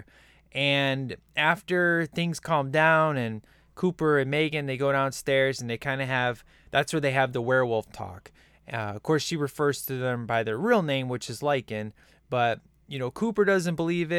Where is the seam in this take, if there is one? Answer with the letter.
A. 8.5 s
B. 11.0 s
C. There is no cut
C